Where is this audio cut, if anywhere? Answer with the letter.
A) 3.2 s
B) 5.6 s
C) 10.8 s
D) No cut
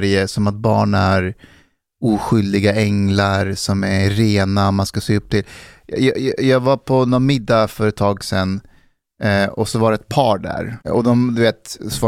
C